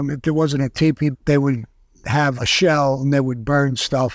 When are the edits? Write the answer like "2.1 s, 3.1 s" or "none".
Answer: 1.1 s, 2.4 s